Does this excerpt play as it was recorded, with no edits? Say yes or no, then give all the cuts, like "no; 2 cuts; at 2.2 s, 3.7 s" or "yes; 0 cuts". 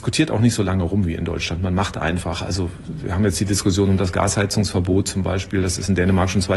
yes; 0 cuts